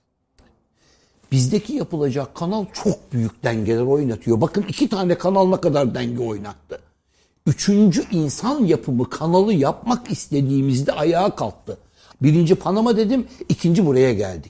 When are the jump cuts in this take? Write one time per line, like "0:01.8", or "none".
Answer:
0:12.1